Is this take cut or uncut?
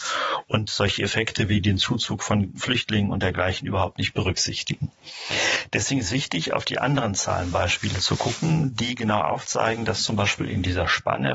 uncut